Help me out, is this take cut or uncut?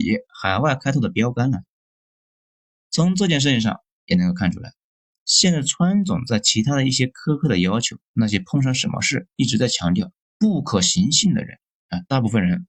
cut